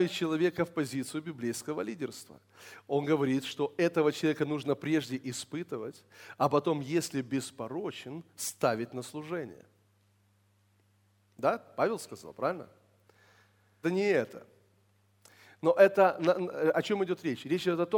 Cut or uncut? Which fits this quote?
cut